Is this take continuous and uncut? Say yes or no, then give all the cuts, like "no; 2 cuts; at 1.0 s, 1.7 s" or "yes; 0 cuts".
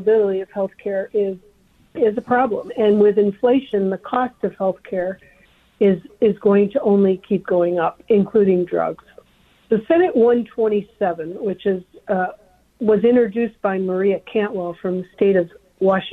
yes; 0 cuts